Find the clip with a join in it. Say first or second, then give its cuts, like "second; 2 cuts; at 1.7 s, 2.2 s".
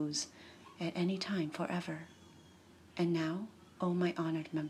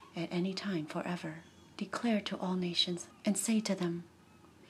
second; 2 cuts; at 1.7 s, 3.1 s